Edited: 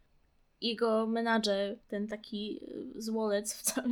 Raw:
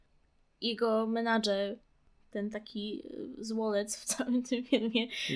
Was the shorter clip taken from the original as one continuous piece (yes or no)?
no